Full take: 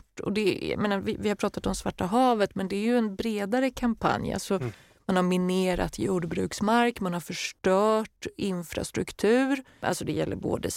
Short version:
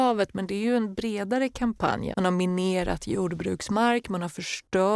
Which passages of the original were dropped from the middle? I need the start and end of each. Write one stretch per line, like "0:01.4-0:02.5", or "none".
0:04.3-0:05.0